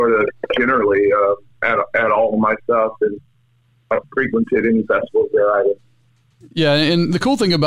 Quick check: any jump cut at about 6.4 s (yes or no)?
no